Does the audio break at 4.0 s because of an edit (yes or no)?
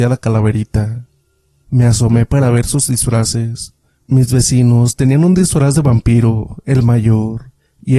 no